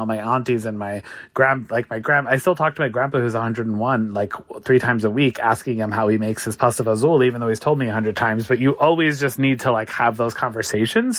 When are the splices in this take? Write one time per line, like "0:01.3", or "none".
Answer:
none